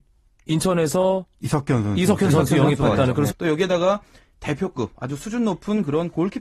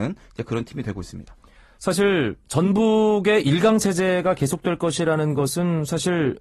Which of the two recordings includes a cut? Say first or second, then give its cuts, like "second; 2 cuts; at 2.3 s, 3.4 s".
first; 1 cut; at 3.3 s